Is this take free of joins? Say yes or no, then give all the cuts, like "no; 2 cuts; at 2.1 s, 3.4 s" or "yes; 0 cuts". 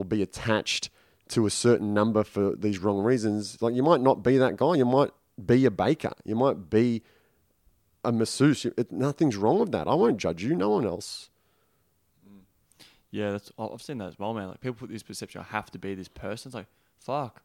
yes; 0 cuts